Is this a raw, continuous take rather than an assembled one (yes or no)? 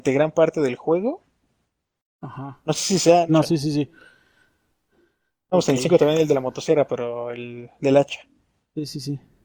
no